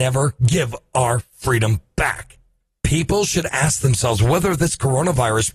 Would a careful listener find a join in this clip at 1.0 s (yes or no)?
no